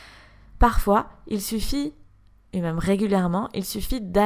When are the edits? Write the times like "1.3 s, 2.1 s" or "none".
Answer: none